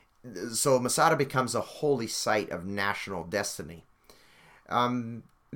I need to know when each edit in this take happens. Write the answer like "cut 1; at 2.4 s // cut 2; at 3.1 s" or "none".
none